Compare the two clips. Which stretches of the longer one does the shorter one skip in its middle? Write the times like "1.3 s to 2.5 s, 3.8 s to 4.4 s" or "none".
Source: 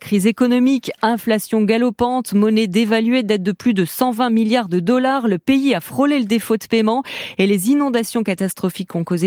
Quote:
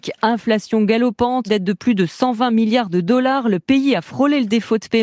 2.3 s to 3.2 s

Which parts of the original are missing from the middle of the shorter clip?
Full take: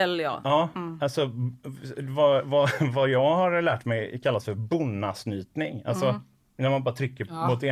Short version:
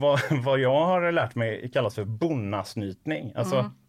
none

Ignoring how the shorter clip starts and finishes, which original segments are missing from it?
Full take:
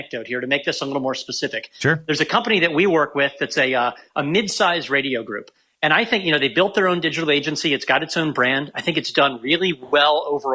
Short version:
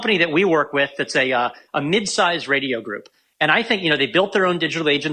none

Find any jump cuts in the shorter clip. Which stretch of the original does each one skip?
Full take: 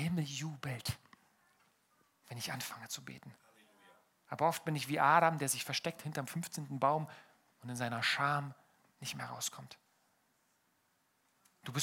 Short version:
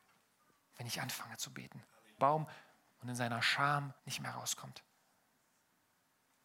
3.7 s to 6.8 s, 8.6 s to 8.9 s

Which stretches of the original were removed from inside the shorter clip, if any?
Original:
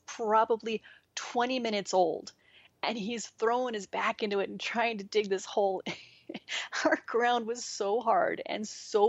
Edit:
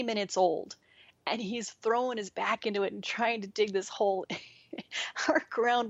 none

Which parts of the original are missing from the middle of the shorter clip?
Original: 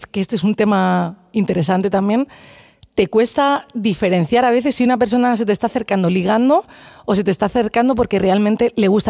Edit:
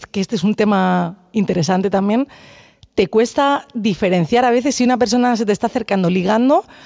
none

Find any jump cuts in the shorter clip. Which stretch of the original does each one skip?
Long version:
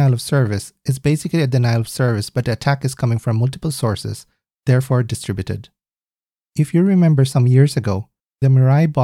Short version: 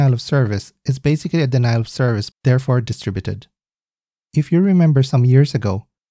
2.3 s to 4.5 s

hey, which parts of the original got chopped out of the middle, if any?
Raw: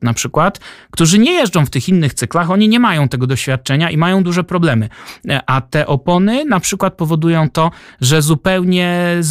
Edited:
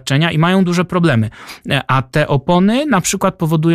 none

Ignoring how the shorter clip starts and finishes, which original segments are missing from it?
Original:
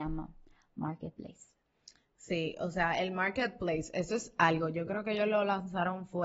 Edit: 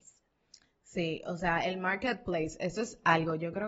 none

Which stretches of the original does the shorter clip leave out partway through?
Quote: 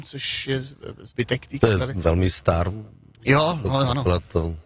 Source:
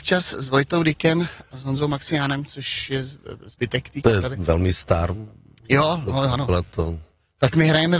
none

